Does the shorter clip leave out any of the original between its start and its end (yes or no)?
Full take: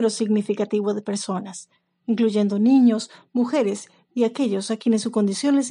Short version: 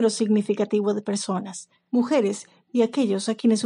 yes